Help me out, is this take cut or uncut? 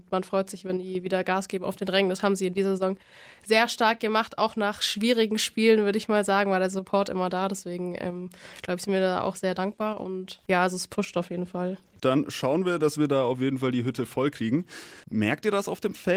cut